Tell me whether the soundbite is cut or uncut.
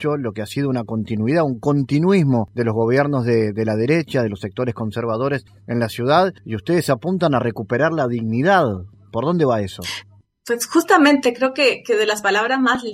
uncut